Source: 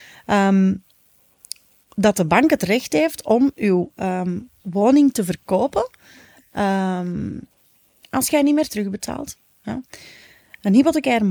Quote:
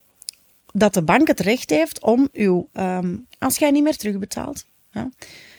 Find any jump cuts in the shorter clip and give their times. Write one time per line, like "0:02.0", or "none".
0:03.3